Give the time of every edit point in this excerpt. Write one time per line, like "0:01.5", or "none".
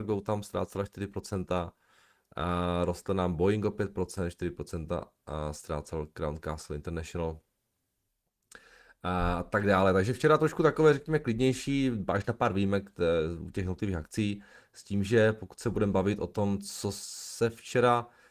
none